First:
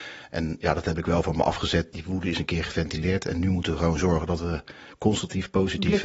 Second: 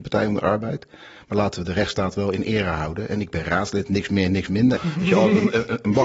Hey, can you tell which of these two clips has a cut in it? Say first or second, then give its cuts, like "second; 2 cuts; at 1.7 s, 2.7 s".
second; 1 cut; at 4.8 s